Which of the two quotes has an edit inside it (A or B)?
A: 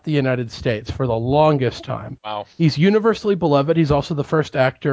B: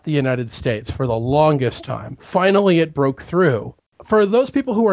A